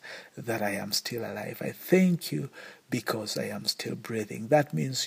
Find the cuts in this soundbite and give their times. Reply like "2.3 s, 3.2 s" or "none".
none